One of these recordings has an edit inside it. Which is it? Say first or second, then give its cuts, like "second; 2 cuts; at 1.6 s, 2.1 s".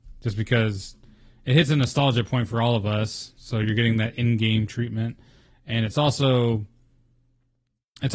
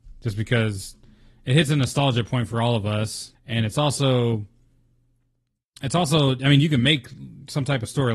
second; 1 cut; at 3.3 s